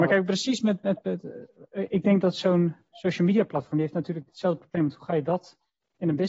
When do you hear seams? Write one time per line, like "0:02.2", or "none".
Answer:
none